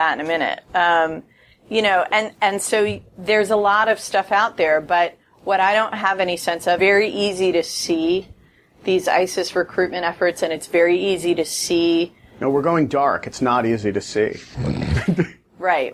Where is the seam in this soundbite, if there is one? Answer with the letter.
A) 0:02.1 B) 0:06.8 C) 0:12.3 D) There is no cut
B